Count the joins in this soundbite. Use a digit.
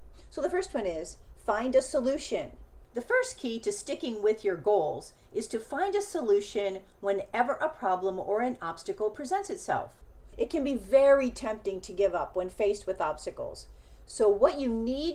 0